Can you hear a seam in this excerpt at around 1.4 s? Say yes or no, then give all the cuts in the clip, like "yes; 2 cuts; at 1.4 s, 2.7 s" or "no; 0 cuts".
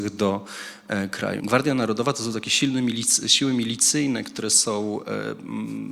yes; 1 cut; at 1.4 s